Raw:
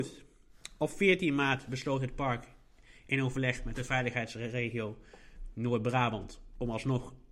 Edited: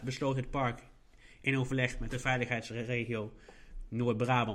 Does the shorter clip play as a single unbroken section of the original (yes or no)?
yes